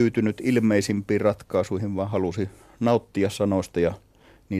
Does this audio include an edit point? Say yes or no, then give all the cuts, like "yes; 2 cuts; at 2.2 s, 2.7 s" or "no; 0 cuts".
no; 0 cuts